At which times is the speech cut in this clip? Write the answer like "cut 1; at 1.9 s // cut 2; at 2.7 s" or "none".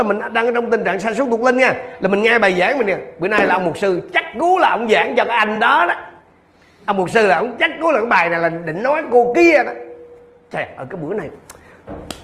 none